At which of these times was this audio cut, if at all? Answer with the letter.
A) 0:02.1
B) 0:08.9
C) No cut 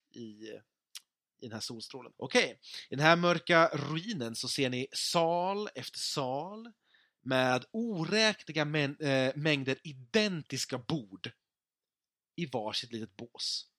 A